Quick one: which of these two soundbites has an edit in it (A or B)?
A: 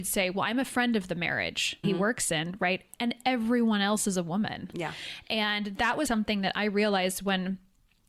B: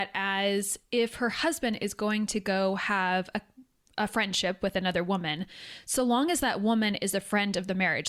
A